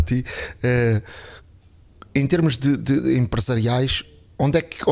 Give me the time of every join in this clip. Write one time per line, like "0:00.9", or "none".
none